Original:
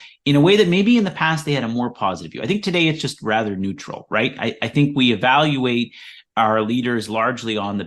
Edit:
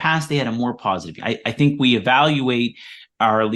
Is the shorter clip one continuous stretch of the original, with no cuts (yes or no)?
no